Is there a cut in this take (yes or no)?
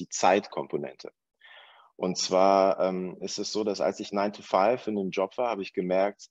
no